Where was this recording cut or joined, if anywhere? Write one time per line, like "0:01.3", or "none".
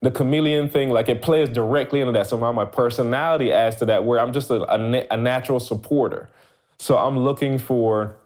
none